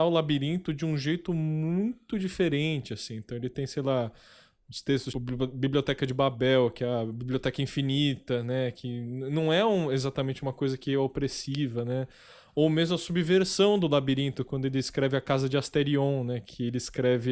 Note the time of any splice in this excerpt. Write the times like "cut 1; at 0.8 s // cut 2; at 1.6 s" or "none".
cut 1; at 5.1 s